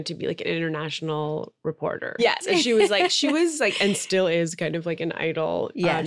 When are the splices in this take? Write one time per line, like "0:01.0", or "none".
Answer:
0:02.2